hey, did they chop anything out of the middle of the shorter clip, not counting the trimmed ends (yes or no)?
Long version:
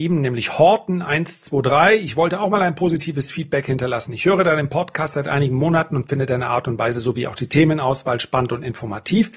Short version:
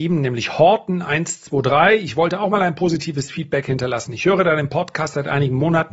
no